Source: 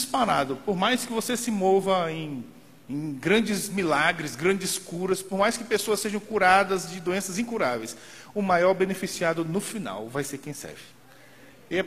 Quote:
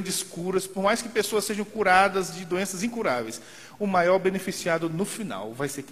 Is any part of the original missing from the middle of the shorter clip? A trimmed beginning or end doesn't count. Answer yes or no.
no